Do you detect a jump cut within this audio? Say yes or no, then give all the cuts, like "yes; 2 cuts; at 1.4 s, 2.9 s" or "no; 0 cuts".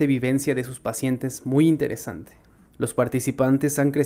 yes; 1 cut; at 2.7 s